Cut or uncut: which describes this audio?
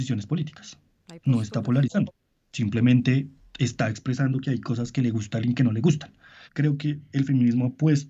cut